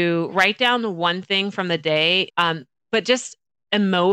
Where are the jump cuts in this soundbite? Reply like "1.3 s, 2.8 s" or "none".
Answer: 2.3 s